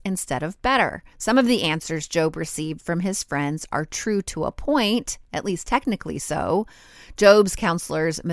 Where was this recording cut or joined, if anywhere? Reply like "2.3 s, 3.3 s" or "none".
1.1 s